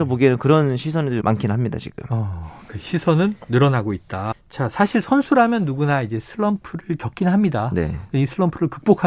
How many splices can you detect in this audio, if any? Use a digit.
2